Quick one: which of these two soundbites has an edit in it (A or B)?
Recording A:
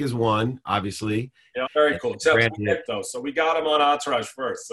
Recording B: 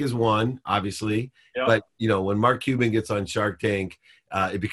A